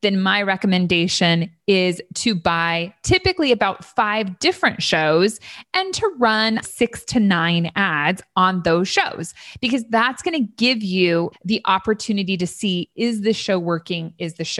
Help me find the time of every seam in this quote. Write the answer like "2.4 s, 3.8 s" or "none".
6.6 s, 11.3 s

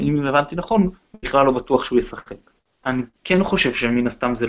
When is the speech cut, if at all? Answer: 2.7 s

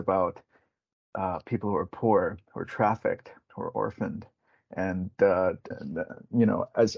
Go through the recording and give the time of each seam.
5.7 s

